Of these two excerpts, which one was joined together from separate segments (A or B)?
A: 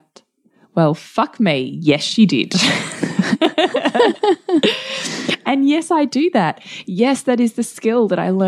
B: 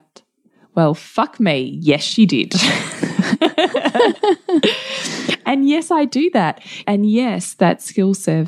B